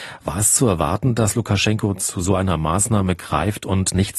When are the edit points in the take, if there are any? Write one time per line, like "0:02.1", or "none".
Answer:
none